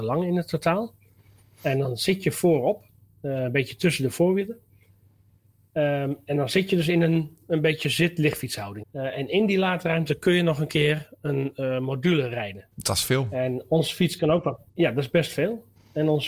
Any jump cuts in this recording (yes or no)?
yes